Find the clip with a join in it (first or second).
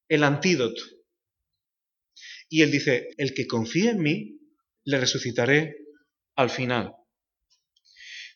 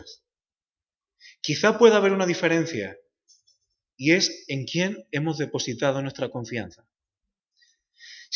first